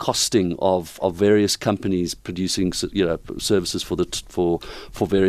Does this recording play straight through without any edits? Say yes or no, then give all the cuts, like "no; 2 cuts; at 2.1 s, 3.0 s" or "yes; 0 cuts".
yes; 0 cuts